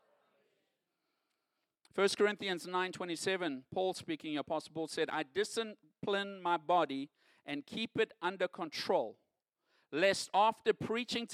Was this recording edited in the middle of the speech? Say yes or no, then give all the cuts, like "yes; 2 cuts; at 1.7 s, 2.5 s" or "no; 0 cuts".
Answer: no; 0 cuts